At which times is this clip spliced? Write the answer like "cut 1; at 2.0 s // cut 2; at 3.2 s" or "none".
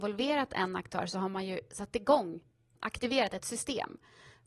cut 1; at 2.8 s